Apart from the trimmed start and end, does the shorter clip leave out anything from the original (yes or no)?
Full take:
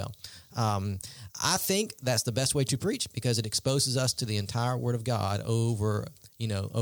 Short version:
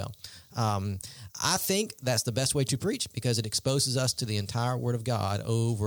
no